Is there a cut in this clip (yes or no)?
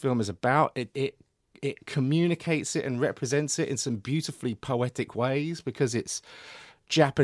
yes